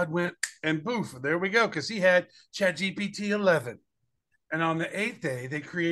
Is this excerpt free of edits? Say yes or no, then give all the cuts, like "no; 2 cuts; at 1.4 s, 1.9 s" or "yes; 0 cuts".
no; 1 cut; at 4.4 s